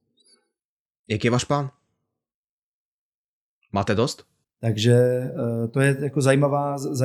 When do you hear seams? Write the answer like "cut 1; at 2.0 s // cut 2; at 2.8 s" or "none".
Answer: cut 1; at 4.4 s